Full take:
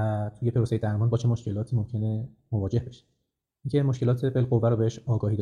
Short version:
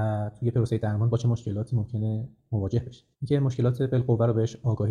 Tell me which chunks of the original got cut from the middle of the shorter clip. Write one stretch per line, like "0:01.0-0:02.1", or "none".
0:03.1-0:03.6